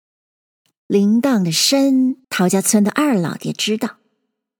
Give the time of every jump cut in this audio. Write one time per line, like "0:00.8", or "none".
0:02.2